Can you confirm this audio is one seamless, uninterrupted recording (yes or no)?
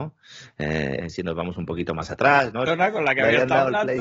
no